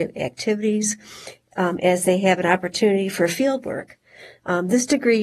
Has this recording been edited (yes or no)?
no